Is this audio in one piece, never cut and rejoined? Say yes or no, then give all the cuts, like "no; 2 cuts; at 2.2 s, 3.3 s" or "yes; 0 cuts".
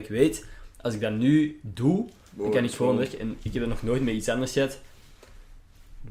yes; 0 cuts